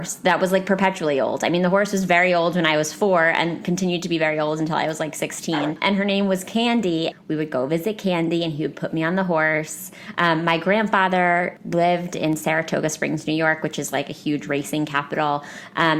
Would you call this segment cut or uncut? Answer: cut